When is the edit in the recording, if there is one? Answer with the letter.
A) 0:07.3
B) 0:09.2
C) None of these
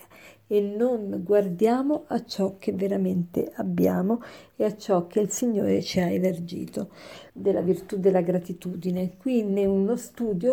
A